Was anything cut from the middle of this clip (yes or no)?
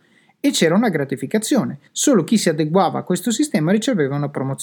yes